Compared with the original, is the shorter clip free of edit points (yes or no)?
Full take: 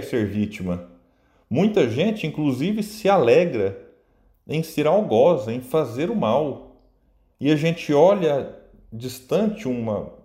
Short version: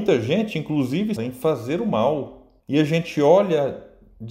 no